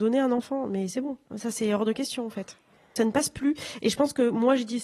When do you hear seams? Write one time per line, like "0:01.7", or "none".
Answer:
0:01.2